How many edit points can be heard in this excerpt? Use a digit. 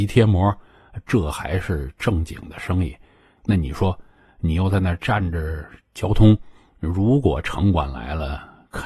1